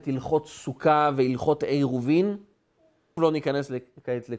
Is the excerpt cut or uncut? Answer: cut